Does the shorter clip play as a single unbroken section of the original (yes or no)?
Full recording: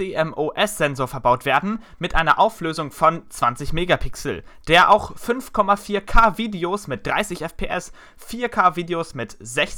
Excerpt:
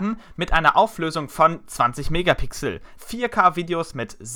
no